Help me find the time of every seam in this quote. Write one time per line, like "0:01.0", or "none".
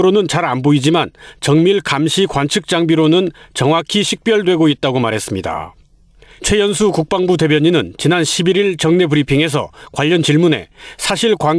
none

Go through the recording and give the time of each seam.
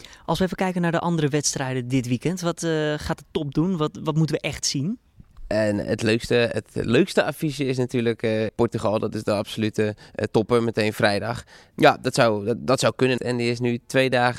0:08.5
0:11.7
0:13.2

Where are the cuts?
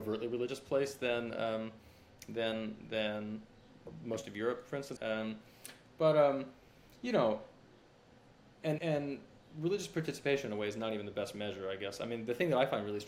0:05.0
0:08.8

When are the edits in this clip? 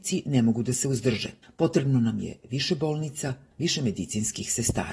0:01.4
0:03.5

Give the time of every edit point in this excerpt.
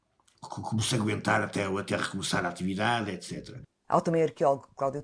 0:03.8

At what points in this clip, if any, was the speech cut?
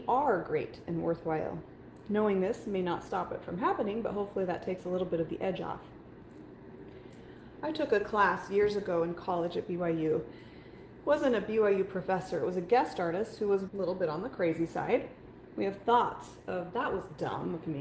0:13.7
0:15.5

